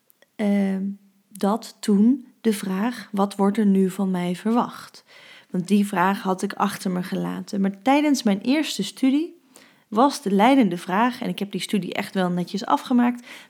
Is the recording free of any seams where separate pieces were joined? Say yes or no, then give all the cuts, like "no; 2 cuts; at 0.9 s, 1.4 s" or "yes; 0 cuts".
yes; 0 cuts